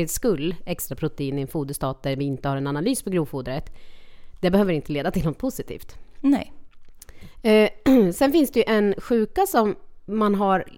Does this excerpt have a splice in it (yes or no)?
no